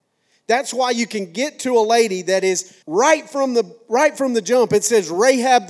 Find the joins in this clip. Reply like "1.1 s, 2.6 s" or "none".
2.8 s